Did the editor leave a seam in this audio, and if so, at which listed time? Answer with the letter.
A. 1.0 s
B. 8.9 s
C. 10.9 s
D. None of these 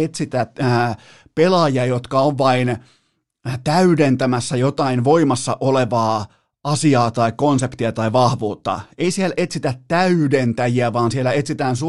D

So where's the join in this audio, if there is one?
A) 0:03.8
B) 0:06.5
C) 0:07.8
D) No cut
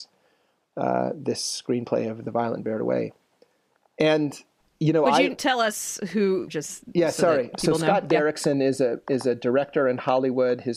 B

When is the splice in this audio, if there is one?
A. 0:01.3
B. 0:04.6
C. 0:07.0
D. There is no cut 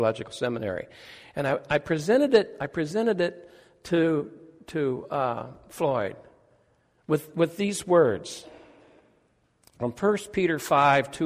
D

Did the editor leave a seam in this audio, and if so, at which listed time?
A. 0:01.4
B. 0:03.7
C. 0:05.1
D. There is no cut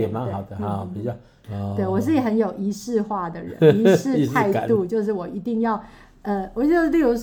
A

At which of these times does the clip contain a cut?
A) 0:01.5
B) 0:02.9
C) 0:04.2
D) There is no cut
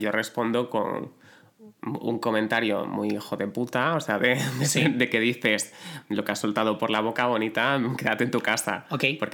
D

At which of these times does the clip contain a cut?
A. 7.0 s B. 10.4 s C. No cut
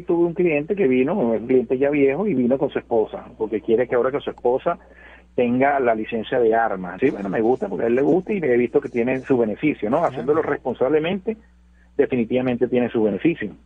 A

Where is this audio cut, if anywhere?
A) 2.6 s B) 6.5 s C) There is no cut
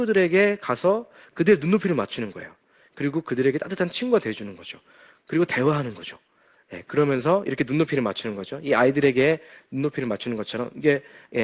B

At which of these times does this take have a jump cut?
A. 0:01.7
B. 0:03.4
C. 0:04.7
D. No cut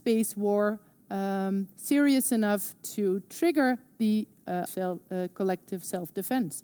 C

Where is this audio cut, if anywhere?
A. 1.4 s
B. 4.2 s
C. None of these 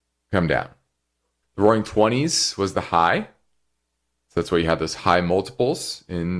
A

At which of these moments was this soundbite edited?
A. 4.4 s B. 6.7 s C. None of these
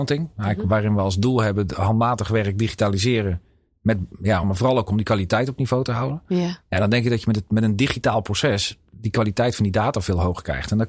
A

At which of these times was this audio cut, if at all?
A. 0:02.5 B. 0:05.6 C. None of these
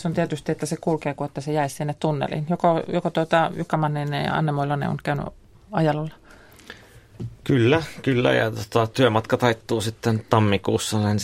C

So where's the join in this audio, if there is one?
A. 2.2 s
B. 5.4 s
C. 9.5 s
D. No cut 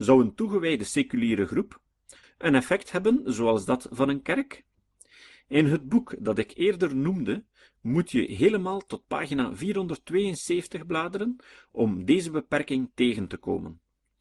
A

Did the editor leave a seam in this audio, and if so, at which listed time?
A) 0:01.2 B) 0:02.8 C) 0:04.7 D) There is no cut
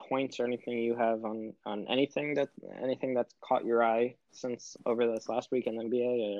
C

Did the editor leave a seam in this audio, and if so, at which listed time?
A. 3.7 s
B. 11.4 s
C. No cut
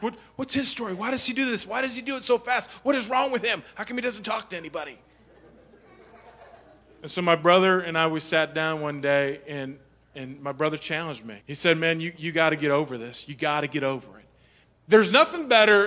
B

